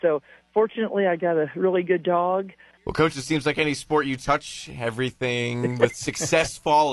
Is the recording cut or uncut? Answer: cut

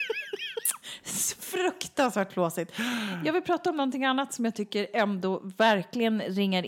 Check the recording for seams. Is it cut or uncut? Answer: uncut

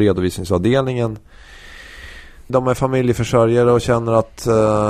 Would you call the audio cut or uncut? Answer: cut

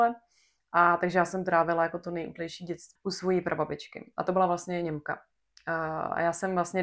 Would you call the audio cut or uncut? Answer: cut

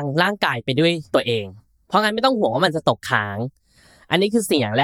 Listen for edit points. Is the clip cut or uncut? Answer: uncut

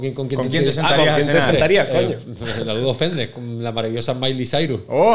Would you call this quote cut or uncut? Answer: uncut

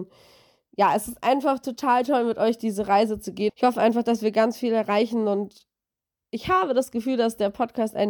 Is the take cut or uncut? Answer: cut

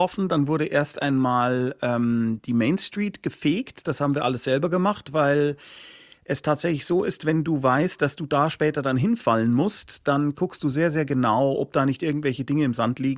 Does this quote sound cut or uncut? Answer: uncut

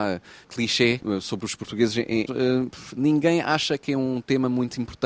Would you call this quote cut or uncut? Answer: cut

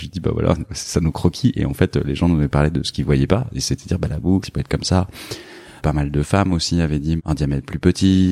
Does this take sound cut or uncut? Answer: cut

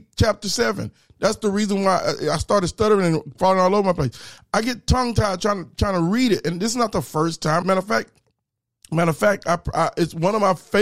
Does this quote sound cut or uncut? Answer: cut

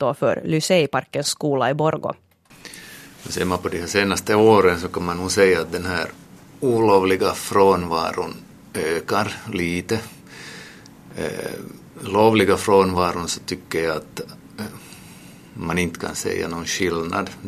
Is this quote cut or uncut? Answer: uncut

